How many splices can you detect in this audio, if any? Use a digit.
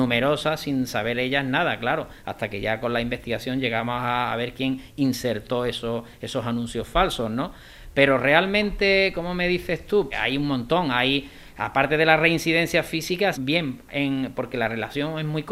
2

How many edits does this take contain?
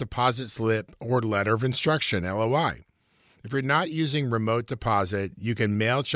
0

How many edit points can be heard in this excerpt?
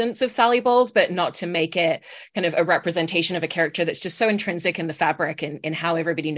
0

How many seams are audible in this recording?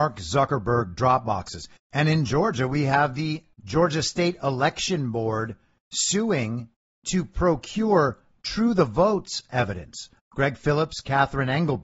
3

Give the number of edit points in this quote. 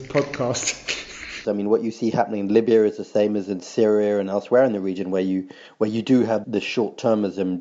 2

